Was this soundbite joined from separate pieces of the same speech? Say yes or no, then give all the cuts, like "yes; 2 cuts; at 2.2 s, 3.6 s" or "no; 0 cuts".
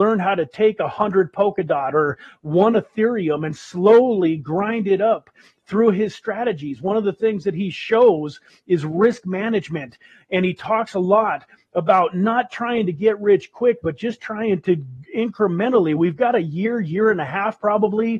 no; 0 cuts